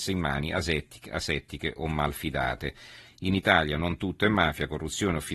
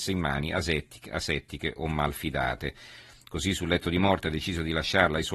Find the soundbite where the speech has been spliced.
first; 1 cut; at 3.0 s

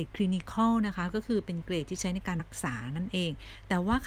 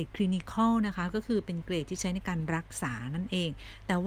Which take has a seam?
first; 1 cut; at 2.4 s

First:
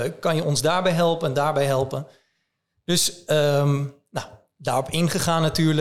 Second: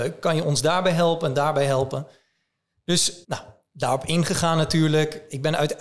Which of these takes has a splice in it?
second; 1 cut; at 3.2 s

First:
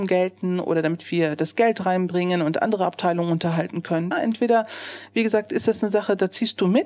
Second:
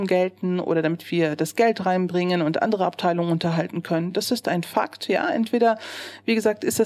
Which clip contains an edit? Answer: first; 1 cut; at 4.1 s

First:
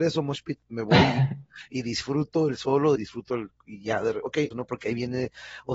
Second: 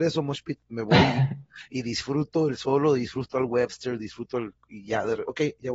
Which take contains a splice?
first; 2 cuts; at 3.0 s, 4.5 s

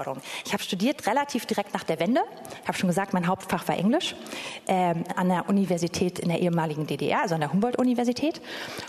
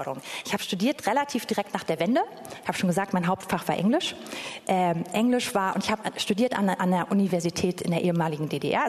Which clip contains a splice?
first; 1 cut; at 5.1 s

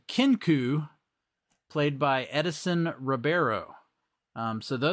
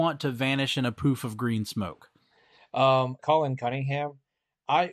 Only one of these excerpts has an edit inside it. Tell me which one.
second; 1 cut; at 3.2 s

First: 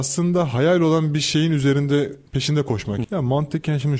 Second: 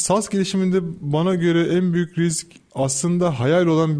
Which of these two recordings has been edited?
first; 1 cut; at 3.0 s

